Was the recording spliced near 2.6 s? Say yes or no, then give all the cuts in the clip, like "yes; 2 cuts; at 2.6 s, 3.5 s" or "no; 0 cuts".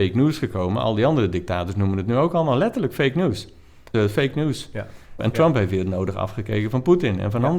no; 2 cuts; at 3.9 s, 5.2 s